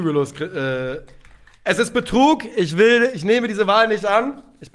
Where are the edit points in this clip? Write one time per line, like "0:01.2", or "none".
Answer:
none